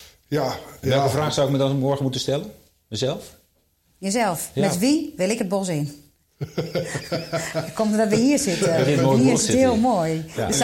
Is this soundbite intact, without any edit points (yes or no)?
yes